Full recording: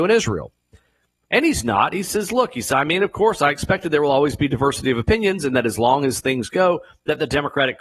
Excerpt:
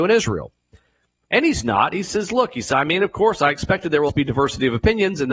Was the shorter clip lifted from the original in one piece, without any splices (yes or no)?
no